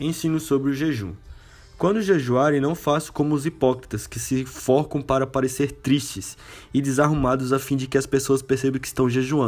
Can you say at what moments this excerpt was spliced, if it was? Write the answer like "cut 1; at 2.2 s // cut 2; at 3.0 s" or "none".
none